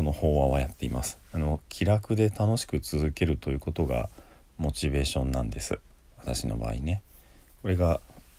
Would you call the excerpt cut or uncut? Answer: uncut